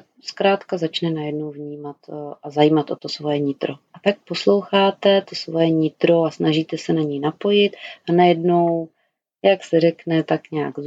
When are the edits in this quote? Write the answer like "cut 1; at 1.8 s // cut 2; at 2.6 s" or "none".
cut 1; at 3.9 s

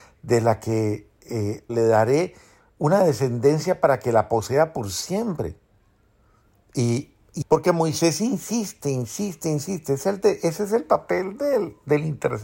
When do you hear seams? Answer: cut 1; at 1.7 s // cut 2; at 7.4 s

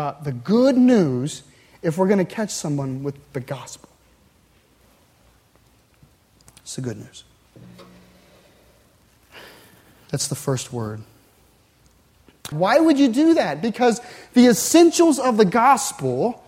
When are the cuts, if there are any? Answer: cut 1; at 12.5 s

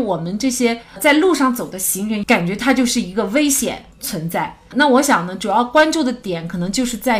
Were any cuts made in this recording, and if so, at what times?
cut 1; at 2.2 s // cut 2; at 4.7 s

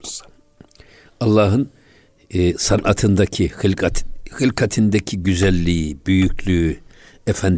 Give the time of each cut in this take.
none

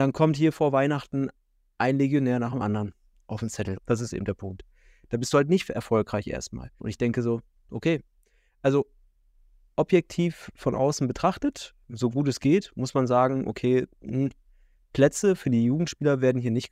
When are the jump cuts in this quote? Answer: cut 1; at 3.8 s // cut 2; at 6.8 s

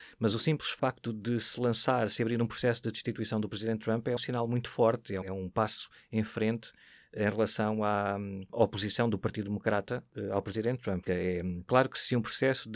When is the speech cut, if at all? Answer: cut 1; at 4.2 s // cut 2; at 5.2 s // cut 3; at 11.1 s

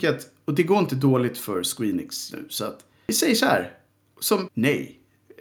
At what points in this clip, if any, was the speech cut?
cut 1; at 2.3 s // cut 2; at 4.5 s

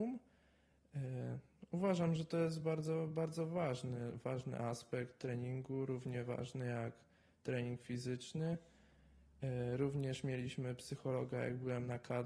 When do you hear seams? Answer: none

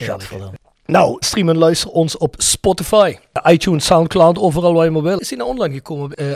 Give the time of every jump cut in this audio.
cut 1; at 1.2 s

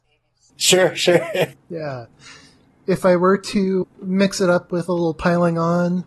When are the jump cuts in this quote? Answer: cut 1; at 1.5 s // cut 2; at 3.8 s

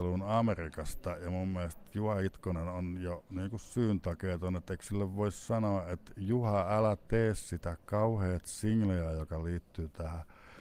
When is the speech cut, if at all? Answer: none

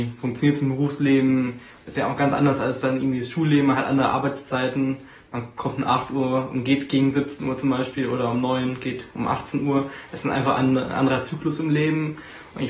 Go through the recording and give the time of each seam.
none

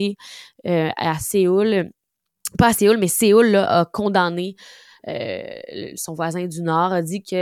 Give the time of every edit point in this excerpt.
none

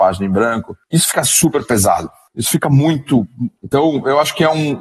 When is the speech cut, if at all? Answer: cut 1; at 3.6 s

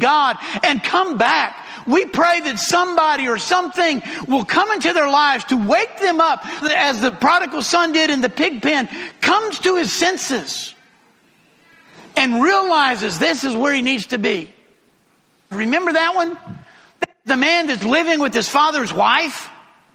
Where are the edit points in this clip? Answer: cut 1; at 6.6 s // cut 2; at 15.5 s

